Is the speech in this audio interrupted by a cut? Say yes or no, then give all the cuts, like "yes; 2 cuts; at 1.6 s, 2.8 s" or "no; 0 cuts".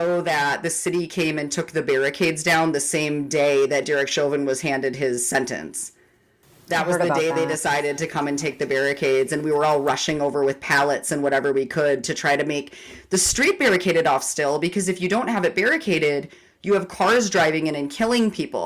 no; 0 cuts